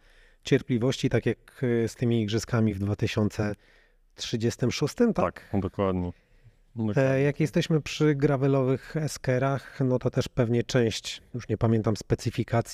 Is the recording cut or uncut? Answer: uncut